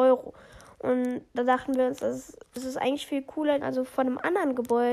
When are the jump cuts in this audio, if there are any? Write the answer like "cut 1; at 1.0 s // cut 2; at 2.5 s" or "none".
cut 1; at 2.5 s // cut 2; at 3.6 s